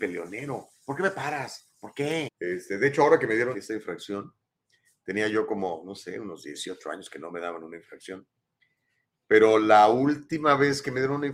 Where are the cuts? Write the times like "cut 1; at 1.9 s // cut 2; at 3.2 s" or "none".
cut 1; at 2.3 s // cut 2; at 3.5 s

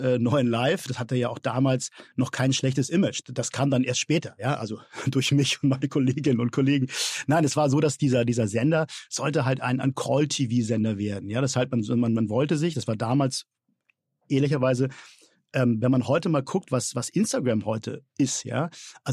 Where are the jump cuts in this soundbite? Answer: none

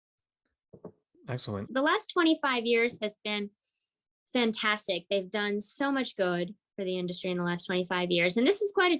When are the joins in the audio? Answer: cut 1; at 1.7 s

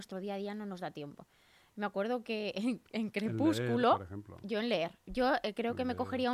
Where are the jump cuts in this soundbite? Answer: none

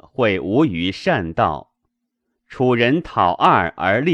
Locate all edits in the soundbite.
cut 1; at 2.3 s

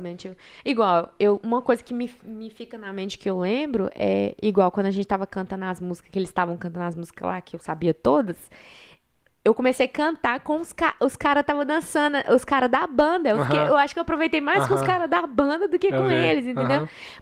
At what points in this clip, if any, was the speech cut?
none

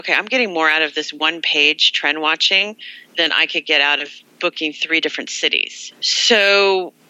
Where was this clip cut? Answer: cut 1; at 5.9 s

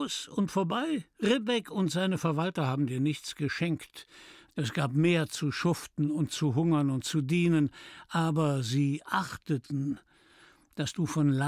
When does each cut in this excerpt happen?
cut 1; at 4.5 s

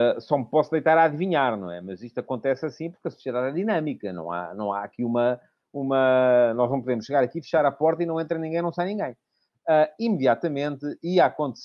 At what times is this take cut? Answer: none

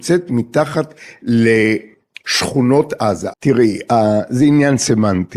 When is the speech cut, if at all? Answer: cut 1; at 3.3 s

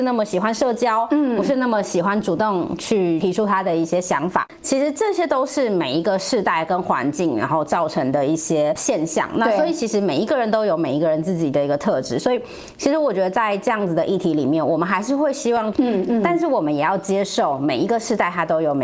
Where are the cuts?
cut 1; at 15.7 s

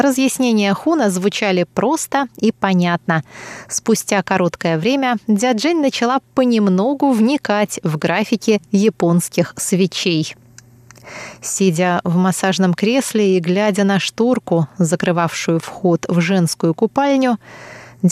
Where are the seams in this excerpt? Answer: none

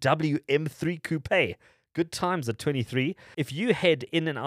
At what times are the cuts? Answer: cut 1; at 3.3 s

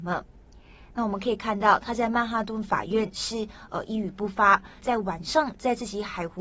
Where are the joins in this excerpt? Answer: cut 1; at 4.8 s

